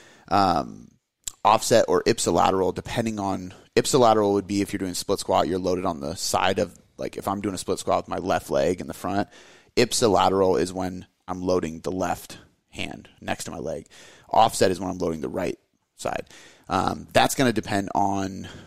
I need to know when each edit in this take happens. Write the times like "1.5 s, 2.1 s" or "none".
none

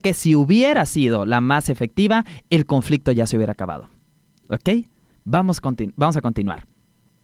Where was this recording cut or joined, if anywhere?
4.4 s

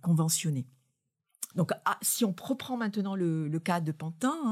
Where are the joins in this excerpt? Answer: 1.5 s

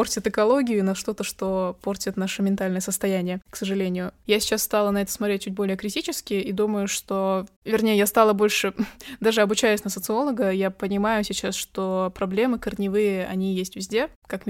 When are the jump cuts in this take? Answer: 4.2 s

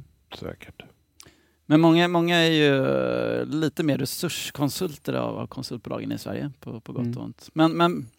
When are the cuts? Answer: none

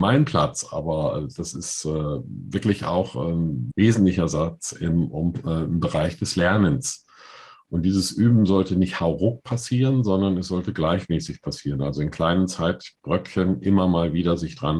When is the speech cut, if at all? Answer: none

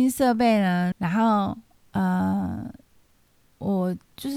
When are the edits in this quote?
0.9 s

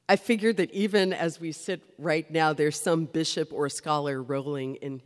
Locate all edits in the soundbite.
none

